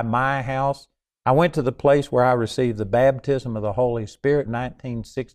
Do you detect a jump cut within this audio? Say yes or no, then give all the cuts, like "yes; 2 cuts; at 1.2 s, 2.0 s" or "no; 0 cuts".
yes; 1 cut; at 4.5 s